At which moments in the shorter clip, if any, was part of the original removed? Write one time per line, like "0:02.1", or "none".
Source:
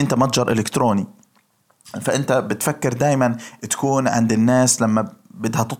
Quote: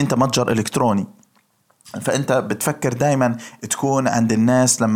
none